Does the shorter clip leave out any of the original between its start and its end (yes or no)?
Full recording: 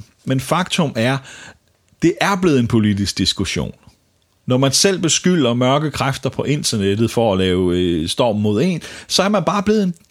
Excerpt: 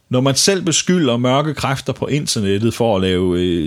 no